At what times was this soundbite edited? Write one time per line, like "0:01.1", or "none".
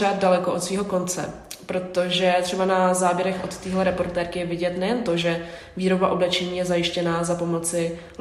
none